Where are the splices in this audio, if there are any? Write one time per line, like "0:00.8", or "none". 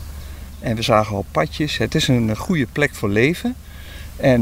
none